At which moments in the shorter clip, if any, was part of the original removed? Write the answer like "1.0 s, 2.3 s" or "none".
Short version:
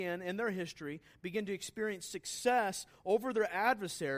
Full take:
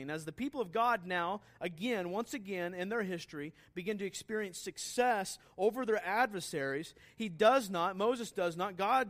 none